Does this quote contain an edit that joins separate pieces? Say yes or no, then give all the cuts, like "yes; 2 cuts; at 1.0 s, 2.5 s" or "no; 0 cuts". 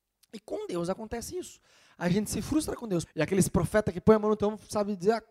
yes; 1 cut; at 3.0 s